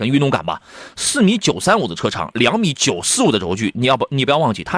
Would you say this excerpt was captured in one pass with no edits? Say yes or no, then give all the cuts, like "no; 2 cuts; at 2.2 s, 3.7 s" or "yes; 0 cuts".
yes; 0 cuts